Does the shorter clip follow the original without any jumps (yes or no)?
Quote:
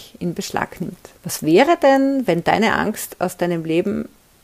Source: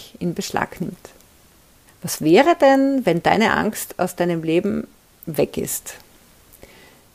no